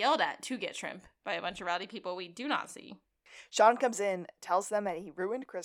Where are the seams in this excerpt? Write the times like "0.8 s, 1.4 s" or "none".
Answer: none